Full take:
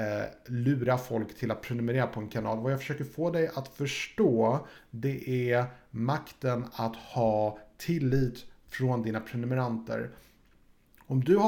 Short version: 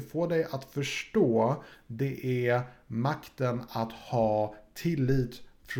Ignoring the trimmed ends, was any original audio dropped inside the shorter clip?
no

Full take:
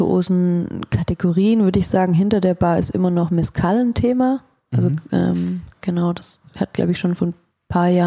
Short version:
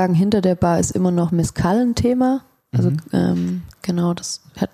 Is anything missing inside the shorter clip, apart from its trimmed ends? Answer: no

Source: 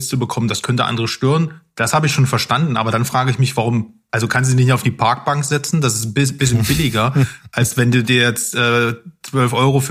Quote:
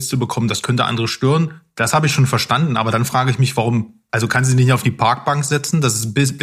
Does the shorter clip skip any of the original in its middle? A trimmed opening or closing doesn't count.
no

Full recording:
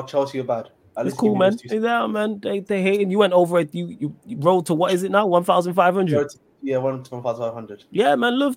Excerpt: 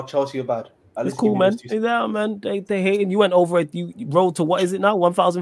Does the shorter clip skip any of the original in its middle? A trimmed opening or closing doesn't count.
yes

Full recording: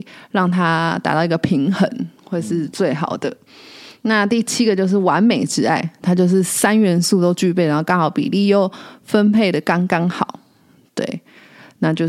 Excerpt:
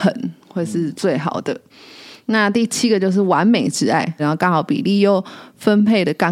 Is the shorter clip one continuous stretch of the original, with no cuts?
no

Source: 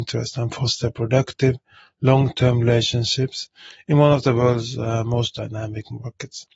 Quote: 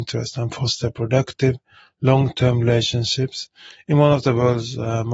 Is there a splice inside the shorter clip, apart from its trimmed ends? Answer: no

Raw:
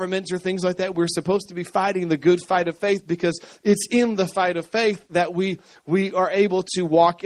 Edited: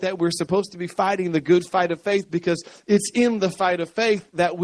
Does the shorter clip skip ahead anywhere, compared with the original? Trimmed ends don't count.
no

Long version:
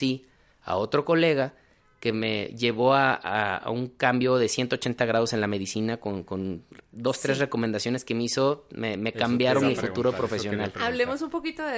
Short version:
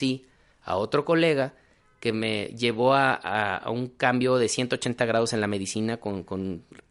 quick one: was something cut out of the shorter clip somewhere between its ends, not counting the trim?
no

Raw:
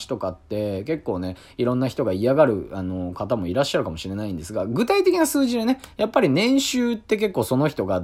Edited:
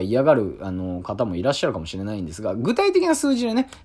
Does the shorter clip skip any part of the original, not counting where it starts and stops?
no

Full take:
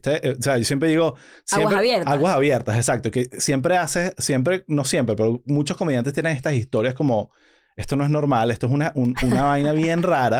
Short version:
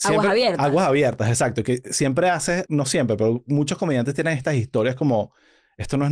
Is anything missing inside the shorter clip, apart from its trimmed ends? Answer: yes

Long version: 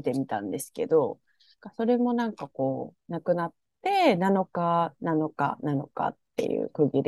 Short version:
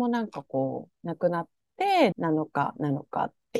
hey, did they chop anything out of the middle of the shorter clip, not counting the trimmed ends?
yes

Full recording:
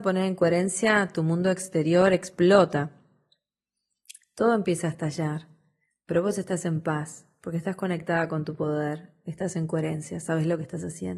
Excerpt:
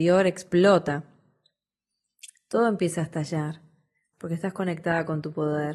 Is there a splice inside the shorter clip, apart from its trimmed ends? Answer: yes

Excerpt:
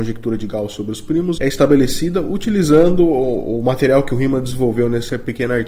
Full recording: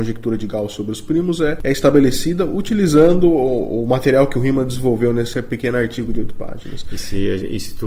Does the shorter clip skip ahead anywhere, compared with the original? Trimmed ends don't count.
yes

